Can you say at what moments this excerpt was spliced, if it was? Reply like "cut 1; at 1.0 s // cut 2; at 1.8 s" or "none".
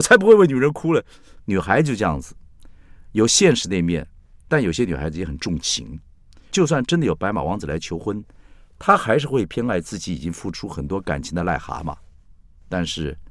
cut 1; at 1.4 s